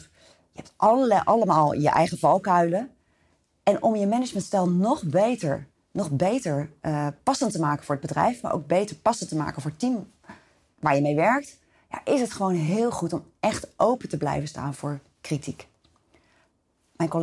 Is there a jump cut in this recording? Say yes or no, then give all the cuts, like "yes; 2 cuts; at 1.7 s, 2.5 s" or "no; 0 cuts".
no; 0 cuts